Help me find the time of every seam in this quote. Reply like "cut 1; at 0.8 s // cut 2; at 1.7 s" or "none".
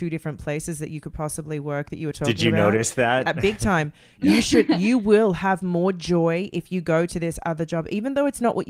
none